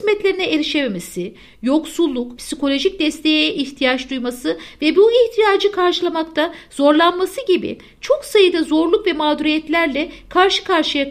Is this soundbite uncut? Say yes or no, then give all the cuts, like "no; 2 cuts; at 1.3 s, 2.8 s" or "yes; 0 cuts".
no; 1 cut; at 2.4 s